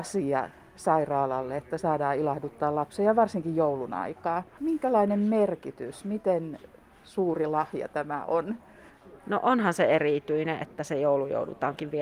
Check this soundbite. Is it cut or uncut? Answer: cut